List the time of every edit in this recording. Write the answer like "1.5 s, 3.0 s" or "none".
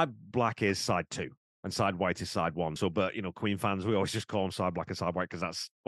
none